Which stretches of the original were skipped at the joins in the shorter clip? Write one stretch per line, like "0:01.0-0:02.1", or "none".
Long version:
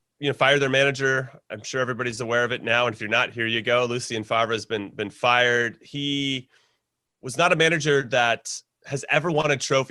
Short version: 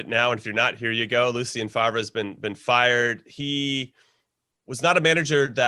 none